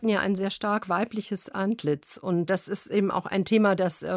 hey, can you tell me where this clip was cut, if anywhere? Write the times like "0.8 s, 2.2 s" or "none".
2.5 s